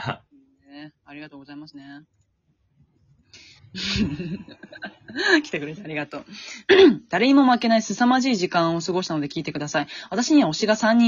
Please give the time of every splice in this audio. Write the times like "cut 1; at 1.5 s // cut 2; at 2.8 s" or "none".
cut 1; at 6.7 s